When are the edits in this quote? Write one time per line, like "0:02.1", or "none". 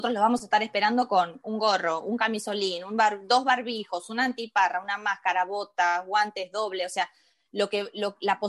none